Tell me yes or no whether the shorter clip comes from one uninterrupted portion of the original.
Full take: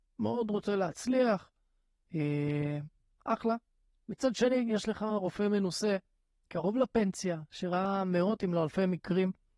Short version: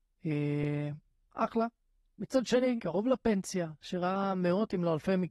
no